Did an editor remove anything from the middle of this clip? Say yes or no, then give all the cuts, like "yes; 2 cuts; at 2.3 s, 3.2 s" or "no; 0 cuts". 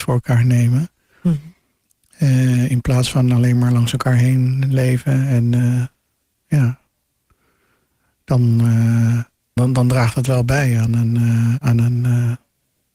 yes; 2 cuts; at 9.6 s, 11.6 s